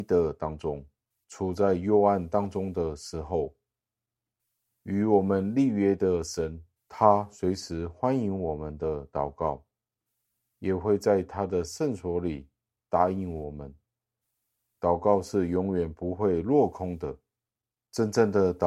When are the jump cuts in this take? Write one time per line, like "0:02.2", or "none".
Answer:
none